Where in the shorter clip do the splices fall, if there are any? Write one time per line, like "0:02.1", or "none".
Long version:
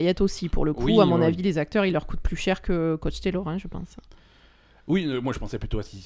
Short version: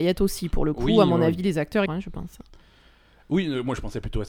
0:01.9